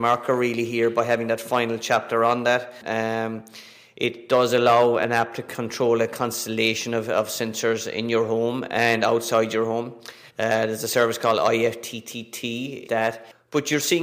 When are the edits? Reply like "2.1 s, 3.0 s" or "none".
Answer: 2.8 s, 10.3 s, 12.8 s